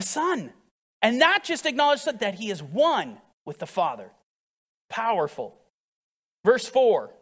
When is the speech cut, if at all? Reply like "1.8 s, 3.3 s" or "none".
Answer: none